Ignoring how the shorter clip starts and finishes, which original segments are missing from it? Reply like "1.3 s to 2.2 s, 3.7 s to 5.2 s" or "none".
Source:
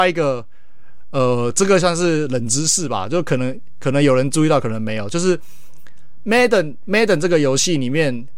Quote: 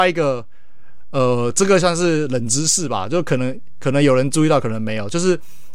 none